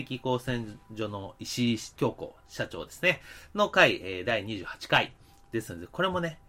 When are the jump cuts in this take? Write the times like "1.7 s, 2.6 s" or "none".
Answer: 4.2 s